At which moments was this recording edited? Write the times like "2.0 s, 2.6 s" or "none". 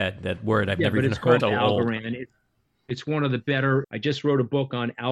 1.4 s, 3.8 s